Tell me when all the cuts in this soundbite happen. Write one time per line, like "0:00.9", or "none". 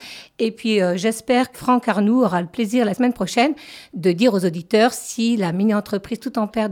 0:01.5
0:02.9